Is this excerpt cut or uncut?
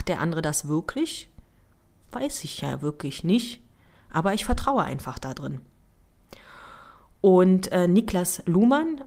uncut